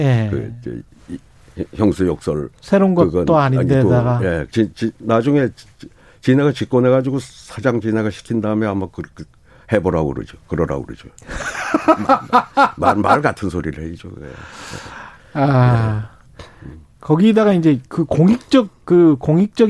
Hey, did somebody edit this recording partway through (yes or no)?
yes